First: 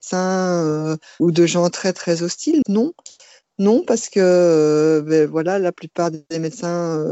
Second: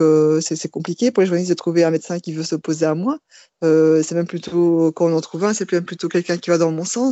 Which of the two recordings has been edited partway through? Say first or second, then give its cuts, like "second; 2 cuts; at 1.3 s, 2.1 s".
first; 2 cuts; at 1.2 s, 2.6 s